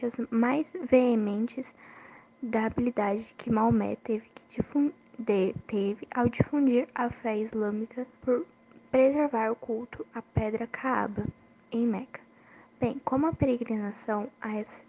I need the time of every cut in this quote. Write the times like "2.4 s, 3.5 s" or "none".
8.1 s